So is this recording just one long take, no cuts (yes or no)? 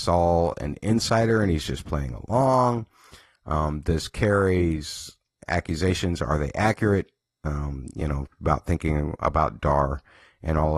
yes